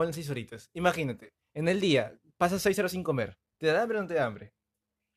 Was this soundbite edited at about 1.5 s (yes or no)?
no